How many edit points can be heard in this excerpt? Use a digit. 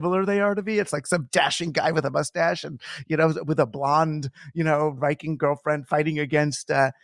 0